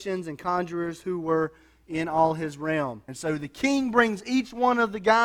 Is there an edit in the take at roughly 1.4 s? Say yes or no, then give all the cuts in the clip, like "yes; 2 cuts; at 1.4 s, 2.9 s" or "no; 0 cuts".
no; 1 cut; at 3.1 s